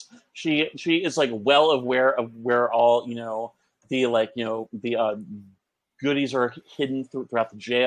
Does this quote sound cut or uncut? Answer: uncut